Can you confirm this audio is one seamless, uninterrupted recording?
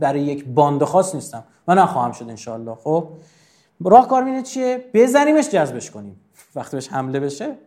yes; 0 cuts

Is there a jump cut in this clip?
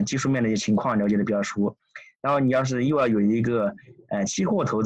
no; 0 cuts

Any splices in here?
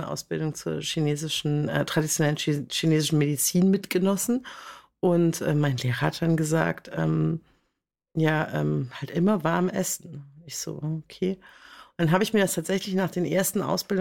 no; 0 cuts

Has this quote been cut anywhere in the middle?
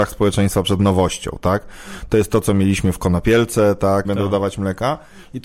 yes; 1 cut; at 4.0 s

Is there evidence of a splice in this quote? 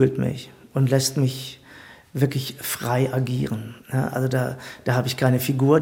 yes; 1 cut; at 3.8 s

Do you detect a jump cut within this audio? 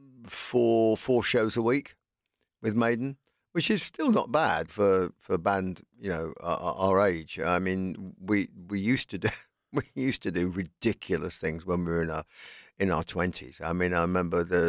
yes; 1 cut; at 4.7 s

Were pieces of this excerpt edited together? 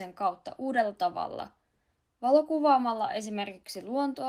yes; 1 cut; at 2.1 s

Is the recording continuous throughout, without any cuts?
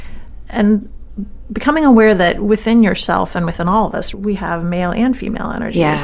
no; 1 cut; at 4.1 s

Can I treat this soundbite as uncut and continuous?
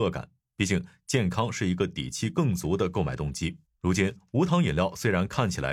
no; 1 cut; at 3.6 s

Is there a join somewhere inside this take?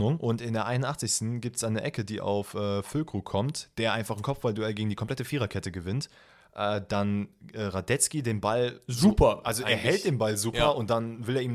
no; 0 cuts

